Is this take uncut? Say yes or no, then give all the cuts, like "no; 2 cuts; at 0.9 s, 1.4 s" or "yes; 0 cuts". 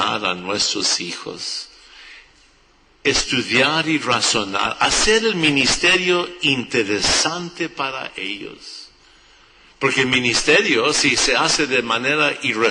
yes; 0 cuts